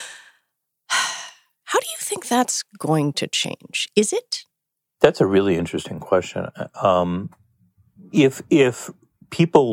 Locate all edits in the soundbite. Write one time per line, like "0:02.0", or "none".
none